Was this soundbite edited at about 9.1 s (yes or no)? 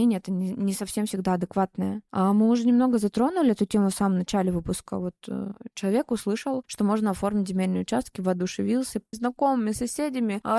yes